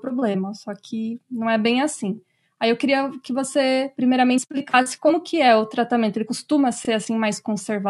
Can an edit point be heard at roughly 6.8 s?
no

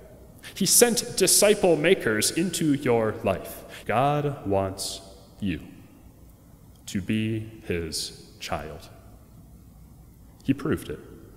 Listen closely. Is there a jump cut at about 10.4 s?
no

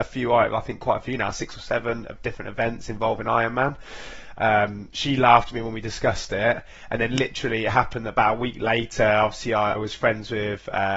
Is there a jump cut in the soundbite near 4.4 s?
yes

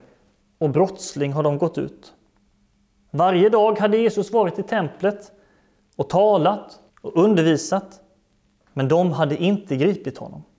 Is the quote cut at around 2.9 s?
no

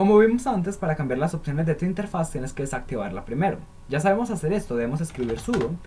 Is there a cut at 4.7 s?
no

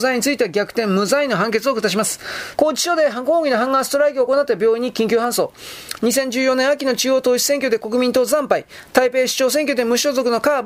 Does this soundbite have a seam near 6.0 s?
yes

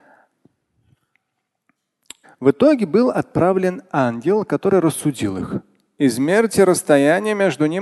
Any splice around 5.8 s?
no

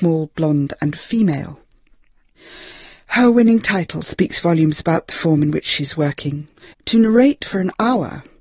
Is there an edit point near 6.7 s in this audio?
yes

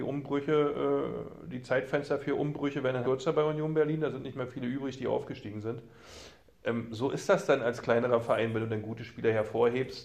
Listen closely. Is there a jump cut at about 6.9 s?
no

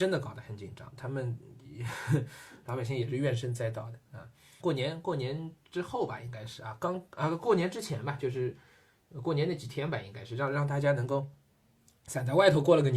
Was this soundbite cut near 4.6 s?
yes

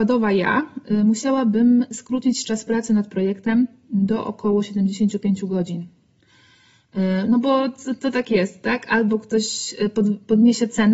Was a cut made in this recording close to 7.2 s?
no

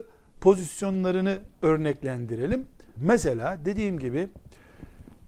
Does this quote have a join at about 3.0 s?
yes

